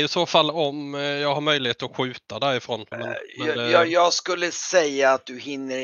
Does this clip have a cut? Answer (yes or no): yes